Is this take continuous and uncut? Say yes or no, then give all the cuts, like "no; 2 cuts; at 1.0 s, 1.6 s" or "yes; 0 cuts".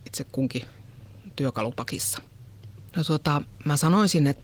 no; 1 cut; at 2.9 s